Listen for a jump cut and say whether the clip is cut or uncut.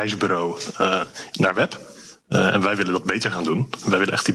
cut